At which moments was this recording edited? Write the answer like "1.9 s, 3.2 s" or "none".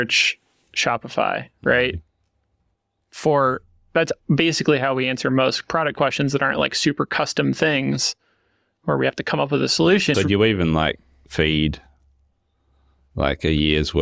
10.1 s